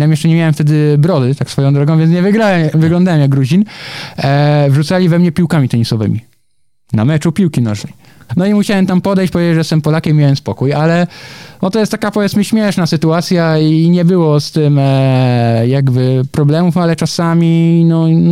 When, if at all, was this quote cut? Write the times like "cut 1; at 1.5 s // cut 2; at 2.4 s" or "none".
cut 1; at 8.3 s